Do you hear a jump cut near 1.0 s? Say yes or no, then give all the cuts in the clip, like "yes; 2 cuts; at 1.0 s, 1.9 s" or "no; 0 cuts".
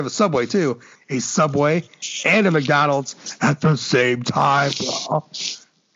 yes; 1 cut; at 1.0 s